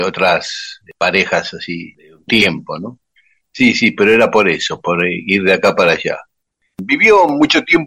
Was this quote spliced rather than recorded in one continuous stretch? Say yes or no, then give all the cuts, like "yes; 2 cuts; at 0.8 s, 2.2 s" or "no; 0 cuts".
no; 0 cuts